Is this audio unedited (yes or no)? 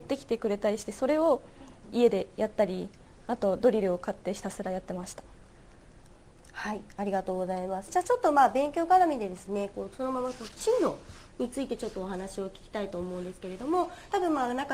yes